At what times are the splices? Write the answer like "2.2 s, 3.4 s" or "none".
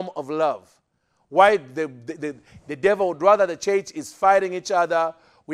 none

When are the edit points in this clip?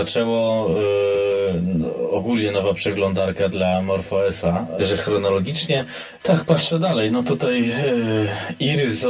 4.8 s, 6.2 s

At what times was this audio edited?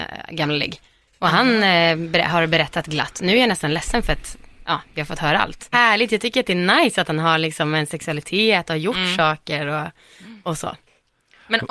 5.7 s

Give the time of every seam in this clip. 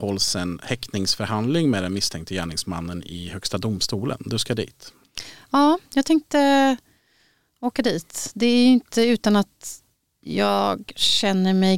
none

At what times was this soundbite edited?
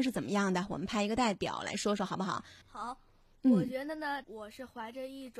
2.6 s, 4.2 s

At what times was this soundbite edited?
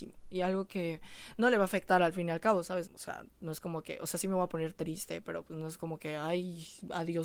2.8 s

